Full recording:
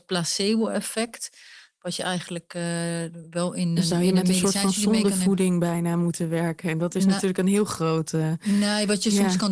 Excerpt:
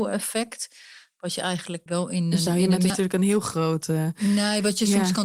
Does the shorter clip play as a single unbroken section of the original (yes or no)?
no